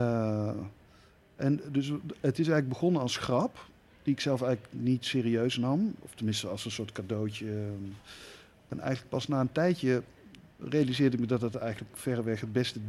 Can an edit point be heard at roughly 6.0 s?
no; 1 cut; at 10.5 s

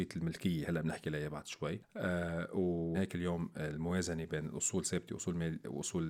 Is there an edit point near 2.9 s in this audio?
yes; 1 cut; at 2.9 s

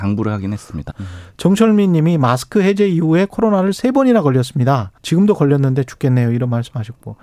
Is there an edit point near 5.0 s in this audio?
yes; 2 cuts; at 0.9 s, 5.0 s

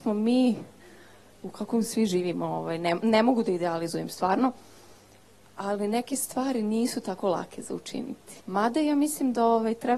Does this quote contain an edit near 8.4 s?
yes; 1 cut; at 8.4 s

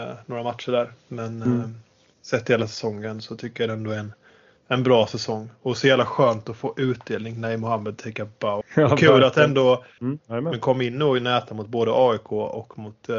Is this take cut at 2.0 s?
no; 2 cuts; at 8.6 s, 10.0 s

